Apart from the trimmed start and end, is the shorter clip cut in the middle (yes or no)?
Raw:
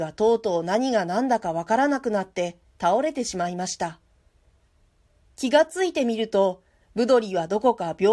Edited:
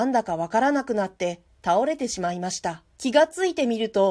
yes